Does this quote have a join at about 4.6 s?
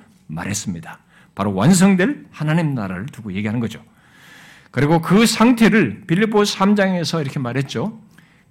no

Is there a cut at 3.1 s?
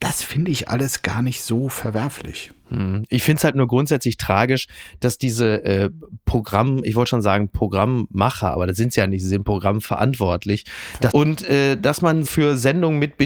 no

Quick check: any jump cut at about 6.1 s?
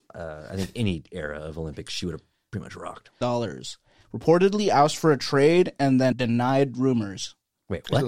yes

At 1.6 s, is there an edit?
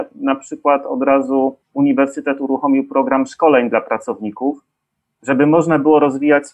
yes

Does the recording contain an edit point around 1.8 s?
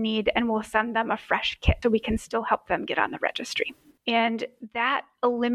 yes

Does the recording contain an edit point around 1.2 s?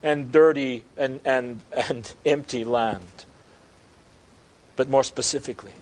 no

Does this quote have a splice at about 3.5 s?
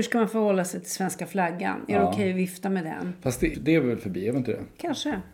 yes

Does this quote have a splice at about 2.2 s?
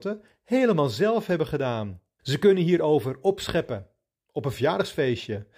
yes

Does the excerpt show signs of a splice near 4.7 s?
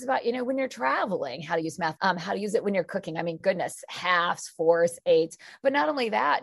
no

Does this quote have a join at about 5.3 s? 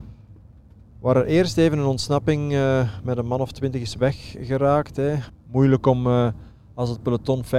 yes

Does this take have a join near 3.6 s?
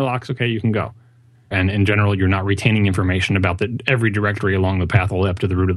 no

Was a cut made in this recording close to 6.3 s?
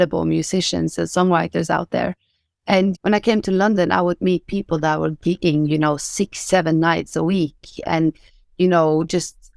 no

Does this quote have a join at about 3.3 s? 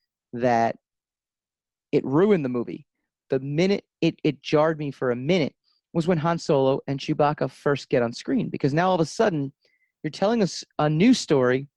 yes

